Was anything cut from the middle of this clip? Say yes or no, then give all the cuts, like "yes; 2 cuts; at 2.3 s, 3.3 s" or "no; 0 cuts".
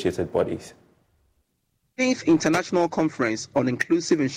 no; 0 cuts